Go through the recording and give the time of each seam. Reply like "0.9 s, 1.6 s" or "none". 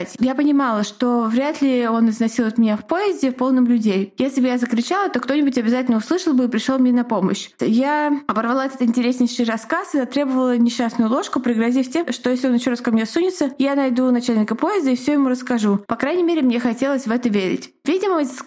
7.6 s, 15.9 s